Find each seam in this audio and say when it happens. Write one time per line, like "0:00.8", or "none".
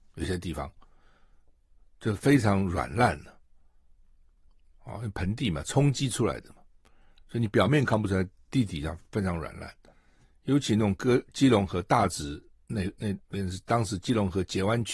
none